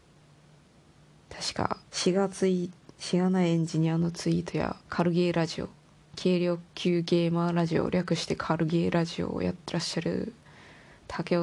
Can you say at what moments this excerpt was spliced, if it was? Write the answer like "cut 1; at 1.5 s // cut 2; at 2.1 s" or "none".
cut 1; at 1.8 s // cut 2; at 4.8 s